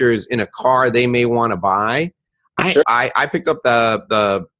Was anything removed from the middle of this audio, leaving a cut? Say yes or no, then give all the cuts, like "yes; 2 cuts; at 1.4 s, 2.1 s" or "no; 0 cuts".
yes; 1 cut; at 2.8 s